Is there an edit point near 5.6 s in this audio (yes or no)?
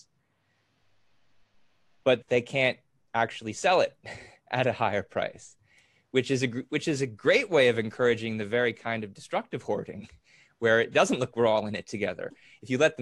no